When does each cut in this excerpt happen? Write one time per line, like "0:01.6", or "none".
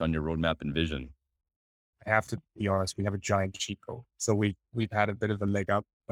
0:04.1